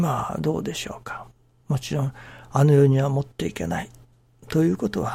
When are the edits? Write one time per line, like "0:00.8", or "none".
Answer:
0:01.6